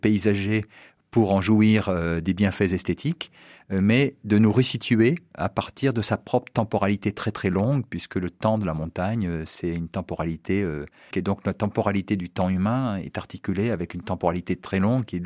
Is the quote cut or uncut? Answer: cut